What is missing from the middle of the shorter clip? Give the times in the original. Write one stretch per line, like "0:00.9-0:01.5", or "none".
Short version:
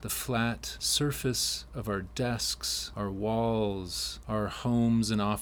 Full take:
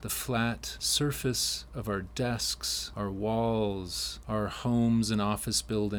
none

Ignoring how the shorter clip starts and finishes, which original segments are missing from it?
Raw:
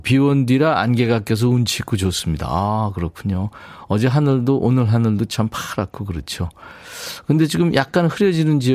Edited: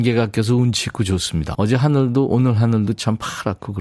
0:02.5-0:03.9

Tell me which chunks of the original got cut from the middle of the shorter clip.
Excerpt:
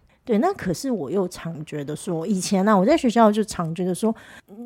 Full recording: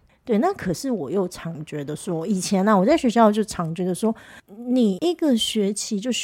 none

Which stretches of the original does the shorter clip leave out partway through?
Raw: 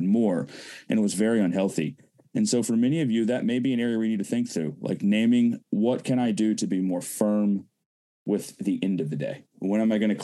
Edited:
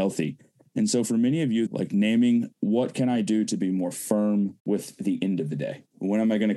0:03.2-0:04.8
0:07.7-0:08.2

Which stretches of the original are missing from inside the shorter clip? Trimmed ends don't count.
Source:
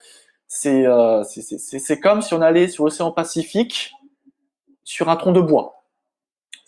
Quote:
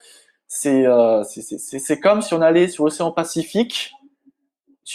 none

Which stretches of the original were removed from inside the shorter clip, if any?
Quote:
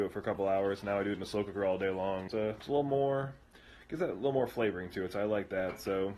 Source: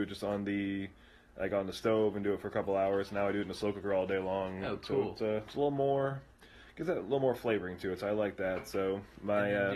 0:04.6-0:05.1

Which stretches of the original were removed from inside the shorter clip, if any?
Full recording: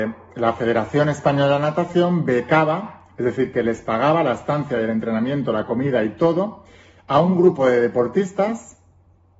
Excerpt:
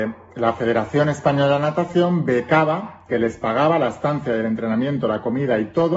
0:03.1-0:03.5

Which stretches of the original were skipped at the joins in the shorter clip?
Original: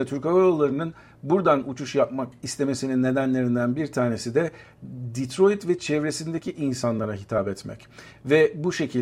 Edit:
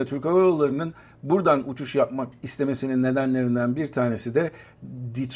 none

